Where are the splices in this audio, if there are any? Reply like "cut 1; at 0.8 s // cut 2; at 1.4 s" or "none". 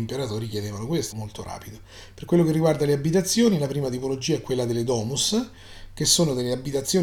cut 1; at 1.1 s